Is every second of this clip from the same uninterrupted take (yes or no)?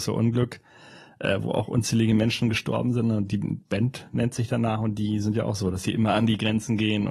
yes